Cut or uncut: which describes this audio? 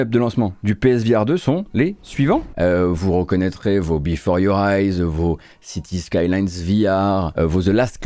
cut